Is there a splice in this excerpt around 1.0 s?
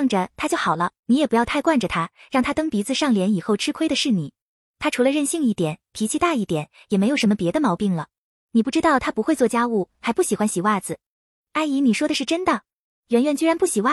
yes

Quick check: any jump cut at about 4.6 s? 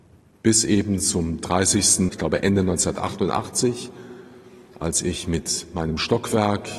no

